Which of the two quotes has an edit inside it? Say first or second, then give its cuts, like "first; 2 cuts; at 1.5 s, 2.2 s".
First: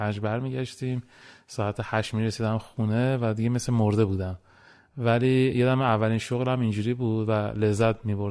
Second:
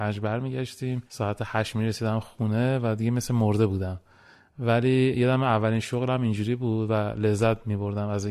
second; 1 cut; at 1.1 s